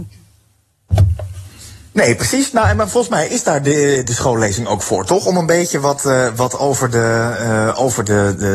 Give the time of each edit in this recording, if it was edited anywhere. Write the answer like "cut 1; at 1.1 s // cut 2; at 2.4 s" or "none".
cut 1; at 4.0 s